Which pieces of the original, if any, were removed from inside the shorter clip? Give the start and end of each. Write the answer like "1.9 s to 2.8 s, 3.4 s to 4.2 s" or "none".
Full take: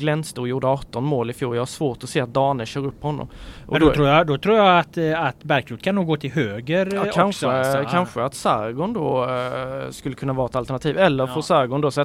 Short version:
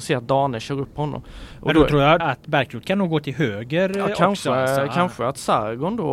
4.3 s to 5.2 s

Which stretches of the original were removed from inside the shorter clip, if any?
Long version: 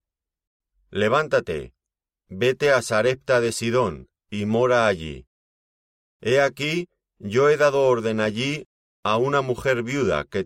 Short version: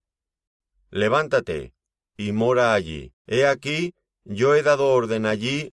2.1 s to 4.2 s, 5.3 s to 6.1 s

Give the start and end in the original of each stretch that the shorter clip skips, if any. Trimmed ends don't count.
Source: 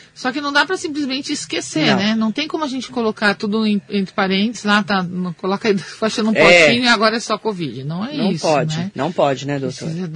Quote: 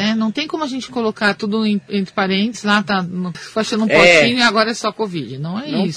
5.4 s to 5.8 s

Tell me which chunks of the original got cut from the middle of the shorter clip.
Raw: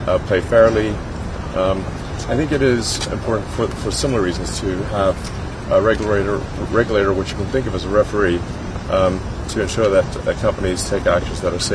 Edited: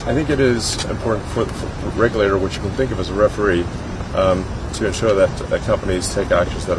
3.8 s to 6.4 s

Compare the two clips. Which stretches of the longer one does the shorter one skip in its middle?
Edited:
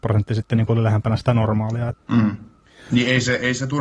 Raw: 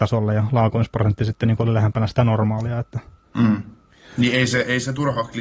2.8 s to 3.2 s

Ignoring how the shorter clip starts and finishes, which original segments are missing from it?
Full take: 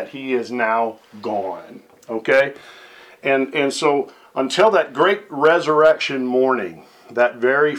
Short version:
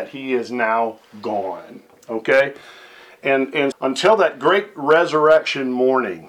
3.7 s to 4.3 s

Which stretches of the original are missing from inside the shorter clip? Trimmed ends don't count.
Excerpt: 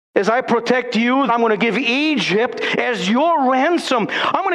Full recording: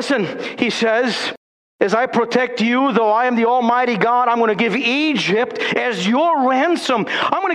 2.9 s to 4.3 s

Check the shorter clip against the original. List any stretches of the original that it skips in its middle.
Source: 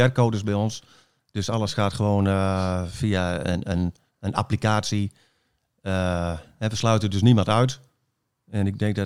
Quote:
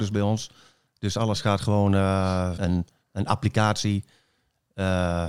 2.9 s to 3.6 s

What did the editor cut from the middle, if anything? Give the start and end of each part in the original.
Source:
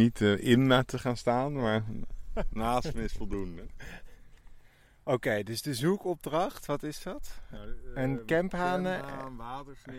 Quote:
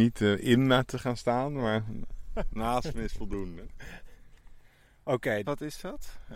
5.4 s to 6.7 s

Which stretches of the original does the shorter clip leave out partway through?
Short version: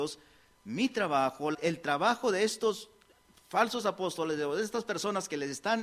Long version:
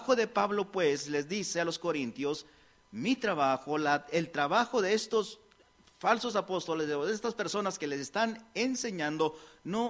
3.8 s to 4.0 s

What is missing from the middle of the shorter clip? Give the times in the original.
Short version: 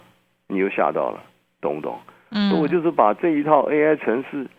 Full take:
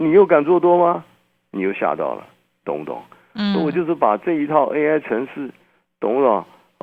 none

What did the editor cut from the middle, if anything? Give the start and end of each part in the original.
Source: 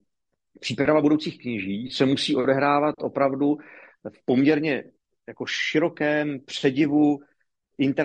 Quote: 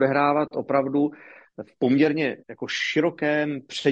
4.9 s to 5.2 s

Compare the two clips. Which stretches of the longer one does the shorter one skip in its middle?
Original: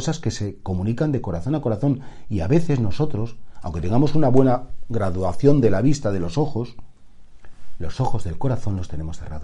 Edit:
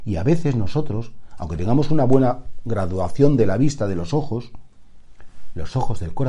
none

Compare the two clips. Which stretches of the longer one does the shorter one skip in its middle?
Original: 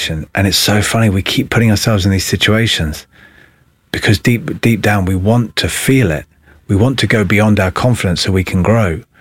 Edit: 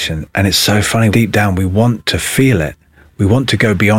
1.1 s to 4.6 s

